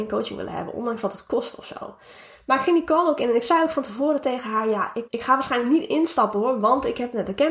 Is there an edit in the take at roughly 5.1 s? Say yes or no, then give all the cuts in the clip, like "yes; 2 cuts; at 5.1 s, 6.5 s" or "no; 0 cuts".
yes; 1 cut; at 5.1 s